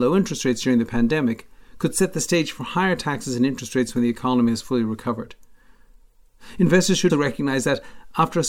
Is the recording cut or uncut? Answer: cut